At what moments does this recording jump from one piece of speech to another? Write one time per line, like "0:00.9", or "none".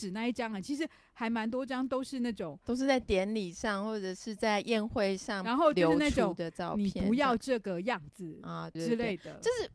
0:08.8